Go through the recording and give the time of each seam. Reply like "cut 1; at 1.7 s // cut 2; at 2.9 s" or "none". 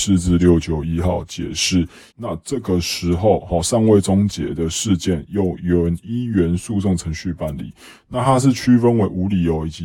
cut 1; at 2.1 s